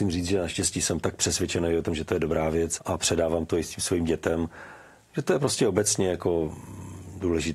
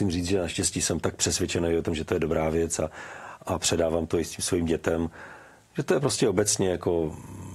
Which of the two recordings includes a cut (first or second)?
first